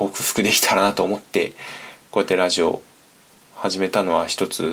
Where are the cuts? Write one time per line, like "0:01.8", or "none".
none